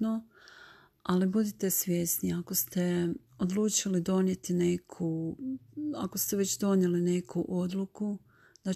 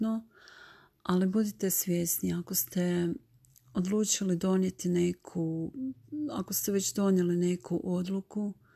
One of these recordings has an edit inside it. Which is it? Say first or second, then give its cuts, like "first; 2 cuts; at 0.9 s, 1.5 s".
first; 1 cut; at 3.3 s